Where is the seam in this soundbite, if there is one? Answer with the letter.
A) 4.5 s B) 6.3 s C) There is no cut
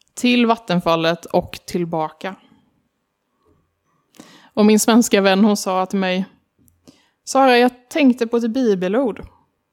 C